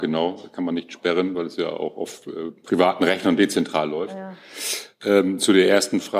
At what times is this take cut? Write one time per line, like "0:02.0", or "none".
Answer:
none